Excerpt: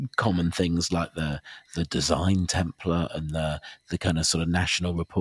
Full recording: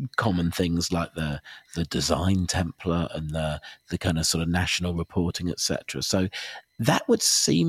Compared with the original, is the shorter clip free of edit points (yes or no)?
yes